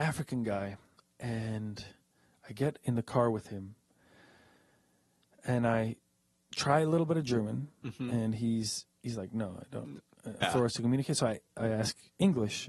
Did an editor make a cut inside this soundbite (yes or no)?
yes